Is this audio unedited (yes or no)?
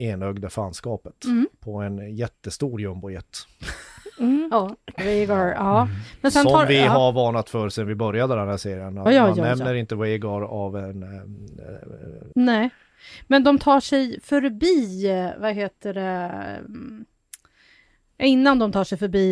no